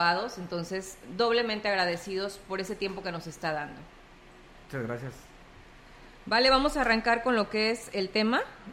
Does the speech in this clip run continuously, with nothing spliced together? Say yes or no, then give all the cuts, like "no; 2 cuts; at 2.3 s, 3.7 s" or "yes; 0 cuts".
yes; 0 cuts